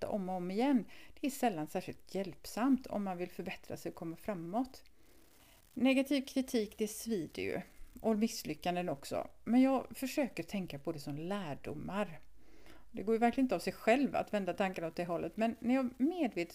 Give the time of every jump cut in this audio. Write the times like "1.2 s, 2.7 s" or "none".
none